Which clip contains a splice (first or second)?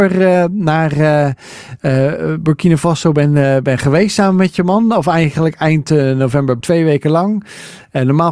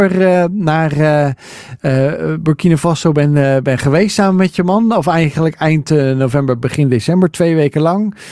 first